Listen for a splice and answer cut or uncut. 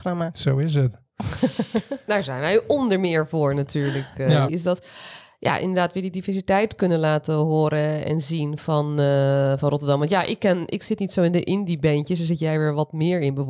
cut